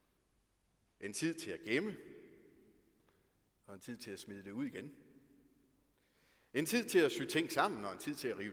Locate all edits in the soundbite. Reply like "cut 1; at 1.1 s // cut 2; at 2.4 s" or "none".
none